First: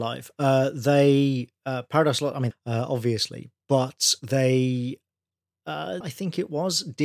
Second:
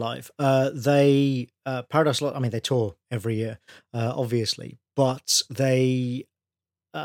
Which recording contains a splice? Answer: first; 2 cuts; at 2.5 s, 6.0 s

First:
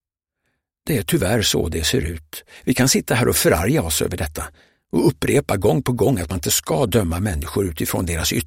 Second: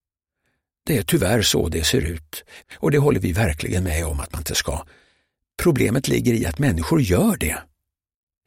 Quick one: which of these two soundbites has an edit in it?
second; 1 cut; at 2.6 s

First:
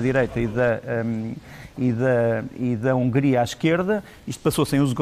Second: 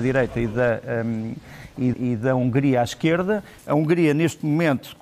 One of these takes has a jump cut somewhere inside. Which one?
second; 2 cuts; at 1.9 s, 3.6 s

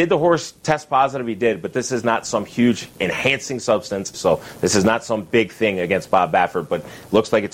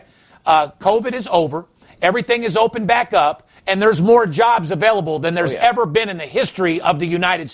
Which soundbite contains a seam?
first; 1 cut; at 4.1 s

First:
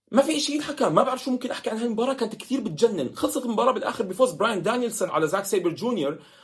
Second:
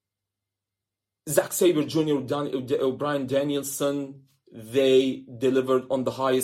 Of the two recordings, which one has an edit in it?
first; 1 cut; at 5.1 s

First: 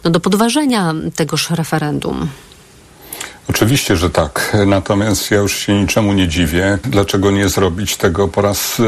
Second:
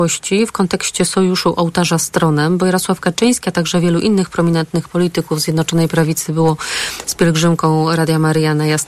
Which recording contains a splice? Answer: first; 1 cut; at 6.8 s

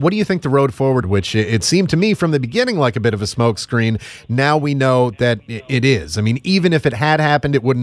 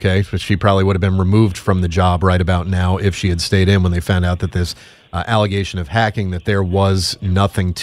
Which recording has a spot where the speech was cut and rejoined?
first; 1 cut; at 1.0 s

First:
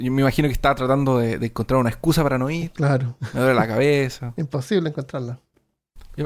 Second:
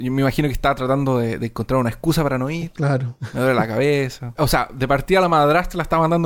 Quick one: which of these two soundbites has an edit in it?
second; 1 cut; at 4.4 s

